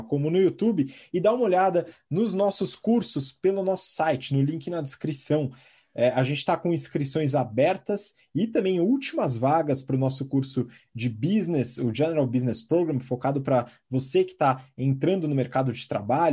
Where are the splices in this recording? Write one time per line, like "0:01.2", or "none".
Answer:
none